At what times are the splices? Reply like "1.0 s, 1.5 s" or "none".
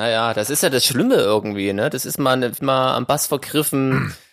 2.6 s